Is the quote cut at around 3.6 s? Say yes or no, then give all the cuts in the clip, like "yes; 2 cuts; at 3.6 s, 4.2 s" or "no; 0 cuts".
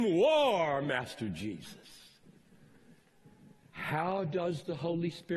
yes; 1 cut; at 3.6 s